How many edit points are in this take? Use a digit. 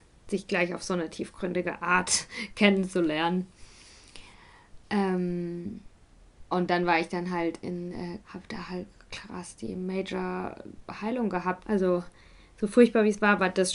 3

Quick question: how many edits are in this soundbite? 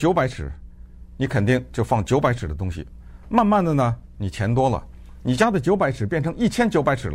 0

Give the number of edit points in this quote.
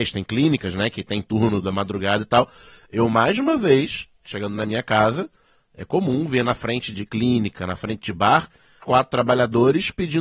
2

